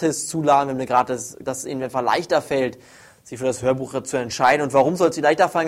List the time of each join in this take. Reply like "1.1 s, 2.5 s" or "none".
1.4 s